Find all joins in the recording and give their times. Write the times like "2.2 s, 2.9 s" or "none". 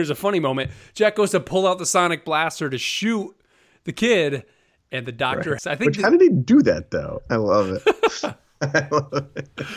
5.6 s, 7.3 s